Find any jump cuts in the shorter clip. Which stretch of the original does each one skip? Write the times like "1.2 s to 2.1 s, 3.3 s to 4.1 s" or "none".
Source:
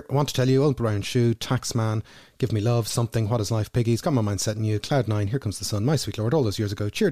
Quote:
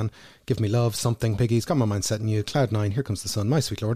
3.3 s to 3.7 s